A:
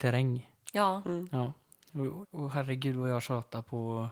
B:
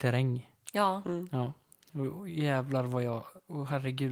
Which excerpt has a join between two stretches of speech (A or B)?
A